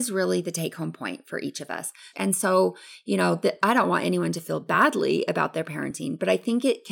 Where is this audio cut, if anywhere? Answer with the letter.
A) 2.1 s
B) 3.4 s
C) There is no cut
A